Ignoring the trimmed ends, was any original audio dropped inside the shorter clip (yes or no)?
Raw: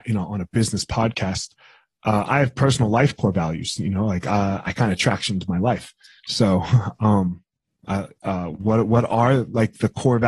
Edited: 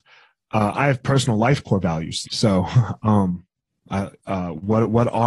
yes